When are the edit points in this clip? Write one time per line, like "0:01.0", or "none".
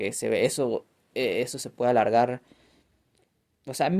none